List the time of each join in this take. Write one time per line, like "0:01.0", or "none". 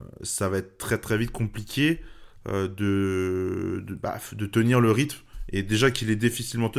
none